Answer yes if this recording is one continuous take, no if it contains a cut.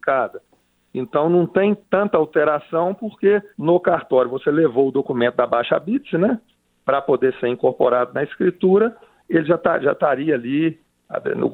no